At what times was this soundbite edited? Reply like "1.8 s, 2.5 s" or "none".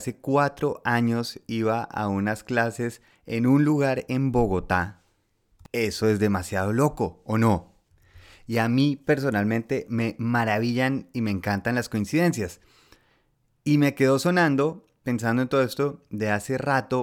none